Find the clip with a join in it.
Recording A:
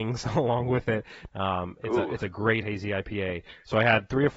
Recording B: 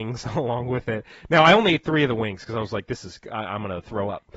A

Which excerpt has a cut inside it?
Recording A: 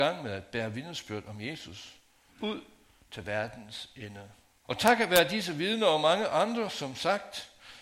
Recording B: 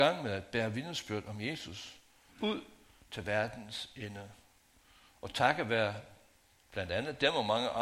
A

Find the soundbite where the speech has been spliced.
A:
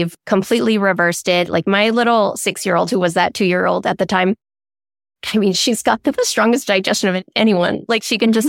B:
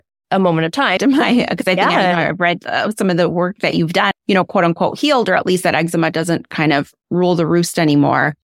B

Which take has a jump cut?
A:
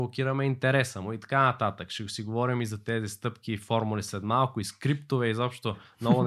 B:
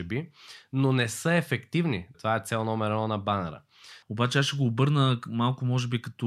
B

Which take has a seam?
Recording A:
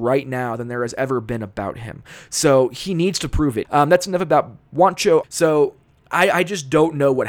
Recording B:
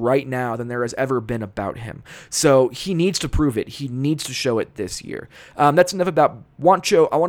A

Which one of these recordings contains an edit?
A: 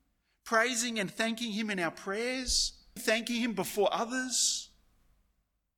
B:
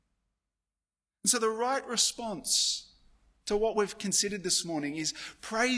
A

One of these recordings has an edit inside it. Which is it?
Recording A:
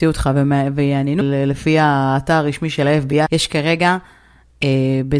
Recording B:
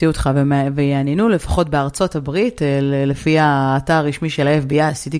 A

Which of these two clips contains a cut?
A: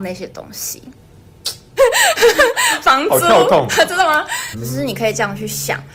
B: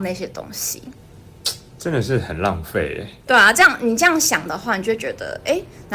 A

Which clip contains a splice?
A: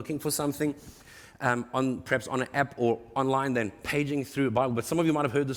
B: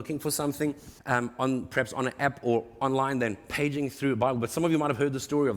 B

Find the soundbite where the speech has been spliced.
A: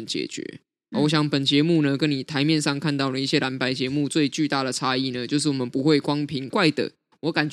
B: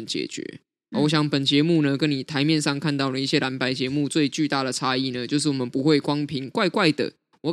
A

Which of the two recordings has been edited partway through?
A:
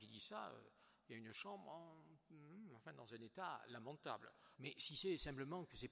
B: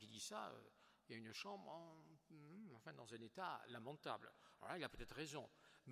A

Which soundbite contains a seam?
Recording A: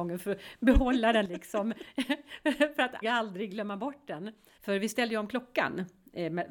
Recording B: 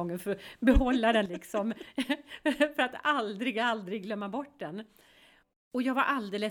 A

